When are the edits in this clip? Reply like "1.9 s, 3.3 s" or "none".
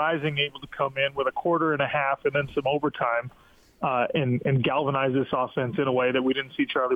none